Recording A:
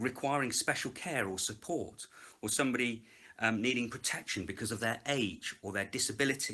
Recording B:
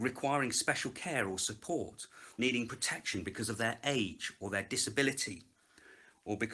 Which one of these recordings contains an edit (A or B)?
B